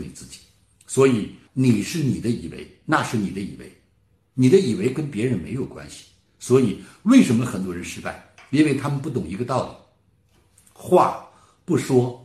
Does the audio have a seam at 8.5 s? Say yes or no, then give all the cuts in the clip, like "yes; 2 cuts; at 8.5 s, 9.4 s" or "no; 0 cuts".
no; 1 cut; at 1.5 s